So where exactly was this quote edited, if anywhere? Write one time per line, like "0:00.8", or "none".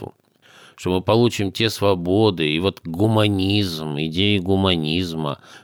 none